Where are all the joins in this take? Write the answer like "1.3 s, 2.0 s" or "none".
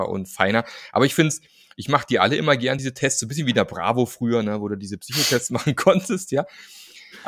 none

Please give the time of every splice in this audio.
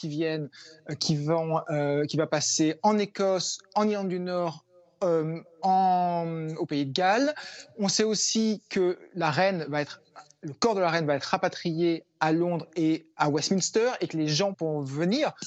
14.5 s

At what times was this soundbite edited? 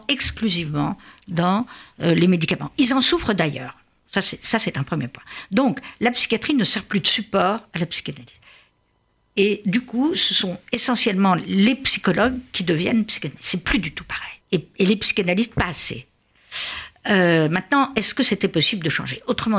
14.4 s

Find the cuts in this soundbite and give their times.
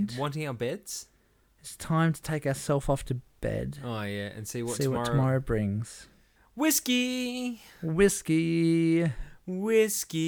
none

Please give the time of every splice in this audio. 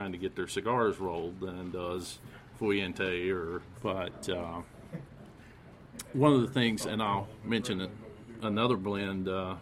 3.7 s

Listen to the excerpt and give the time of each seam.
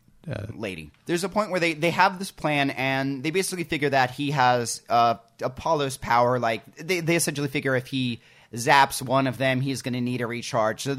1.0 s

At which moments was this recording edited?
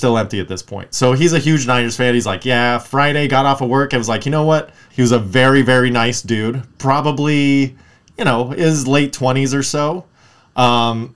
4.9 s

